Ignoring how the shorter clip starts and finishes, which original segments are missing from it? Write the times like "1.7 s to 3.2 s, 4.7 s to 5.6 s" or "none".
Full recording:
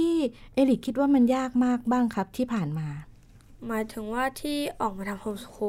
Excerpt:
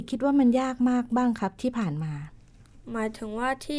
none

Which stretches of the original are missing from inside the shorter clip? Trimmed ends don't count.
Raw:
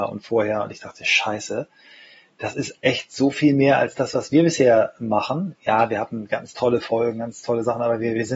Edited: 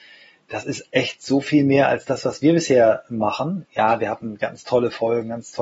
none

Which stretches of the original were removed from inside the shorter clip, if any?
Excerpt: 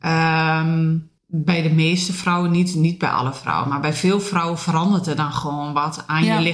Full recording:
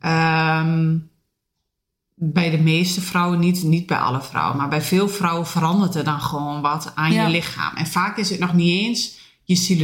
1.2 s to 2.1 s

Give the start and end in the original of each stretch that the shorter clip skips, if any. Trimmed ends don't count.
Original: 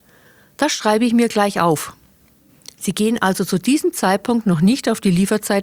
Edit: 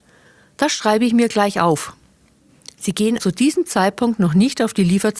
3.2 s to 3.5 s

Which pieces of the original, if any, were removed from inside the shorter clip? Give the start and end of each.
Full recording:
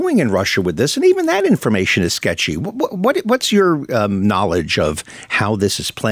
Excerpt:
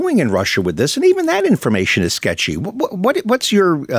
none

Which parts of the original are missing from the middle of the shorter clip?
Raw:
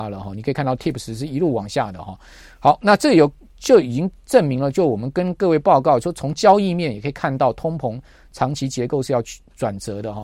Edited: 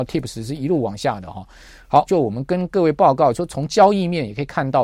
2.8 s to 4.7 s

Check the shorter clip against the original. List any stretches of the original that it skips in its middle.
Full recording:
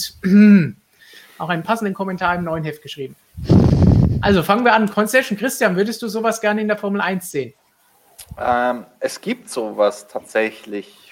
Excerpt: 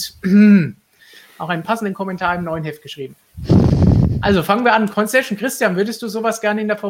none

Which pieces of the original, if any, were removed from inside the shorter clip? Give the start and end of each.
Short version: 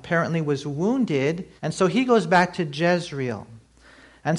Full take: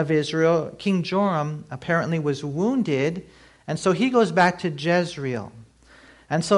3.3 s to 3.6 s

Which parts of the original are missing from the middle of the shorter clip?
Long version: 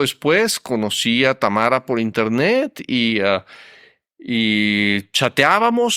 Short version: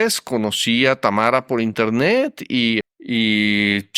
3.2 s to 4.0 s

